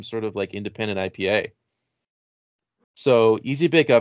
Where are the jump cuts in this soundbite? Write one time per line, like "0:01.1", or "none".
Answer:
0:02.8